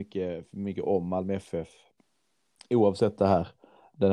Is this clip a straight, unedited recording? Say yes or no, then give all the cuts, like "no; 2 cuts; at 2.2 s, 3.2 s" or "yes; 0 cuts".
yes; 0 cuts